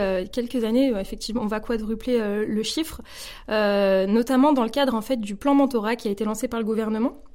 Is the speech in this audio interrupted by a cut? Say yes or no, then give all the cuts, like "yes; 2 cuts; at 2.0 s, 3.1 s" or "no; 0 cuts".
yes; 1 cut; at 1.4 s